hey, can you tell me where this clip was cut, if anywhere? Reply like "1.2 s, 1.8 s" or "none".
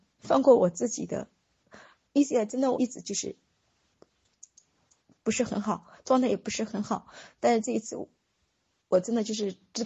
2.7 s